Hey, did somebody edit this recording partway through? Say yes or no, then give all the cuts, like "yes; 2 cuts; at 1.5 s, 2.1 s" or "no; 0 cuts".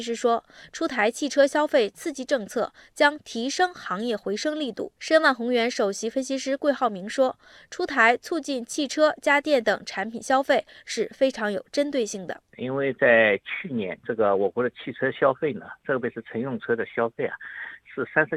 no; 0 cuts